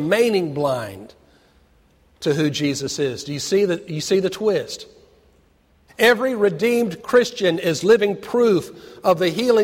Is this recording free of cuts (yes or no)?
no